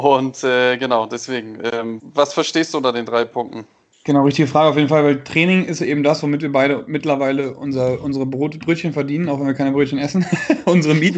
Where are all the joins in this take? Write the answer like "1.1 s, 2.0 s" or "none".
2.0 s, 3.9 s